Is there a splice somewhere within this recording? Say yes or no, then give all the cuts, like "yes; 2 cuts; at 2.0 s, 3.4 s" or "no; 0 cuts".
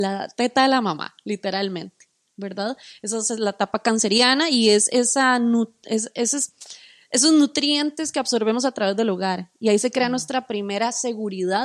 no; 0 cuts